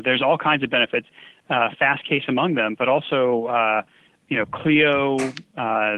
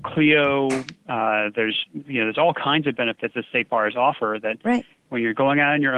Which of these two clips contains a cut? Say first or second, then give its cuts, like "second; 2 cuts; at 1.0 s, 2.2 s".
second; 1 cut; at 5.1 s